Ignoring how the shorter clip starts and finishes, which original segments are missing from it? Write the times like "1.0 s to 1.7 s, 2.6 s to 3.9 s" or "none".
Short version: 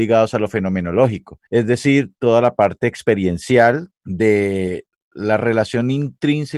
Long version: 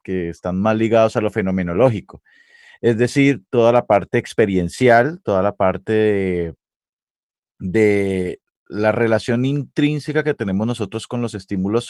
2.3 s to 2.8 s, 5.2 s to 7.5 s